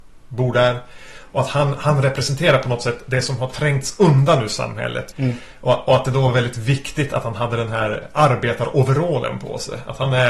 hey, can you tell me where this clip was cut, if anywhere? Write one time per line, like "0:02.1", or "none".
0:05.1